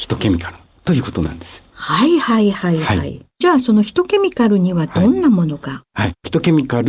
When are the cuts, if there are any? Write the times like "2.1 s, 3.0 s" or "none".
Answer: none